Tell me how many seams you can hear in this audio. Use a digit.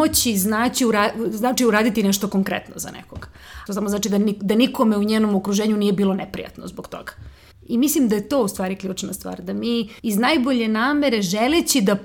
3